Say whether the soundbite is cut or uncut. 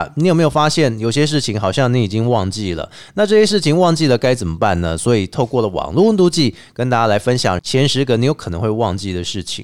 uncut